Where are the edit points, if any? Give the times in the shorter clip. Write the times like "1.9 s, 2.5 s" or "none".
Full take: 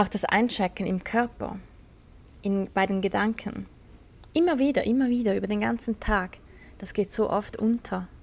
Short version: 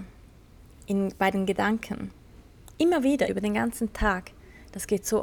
3.3 s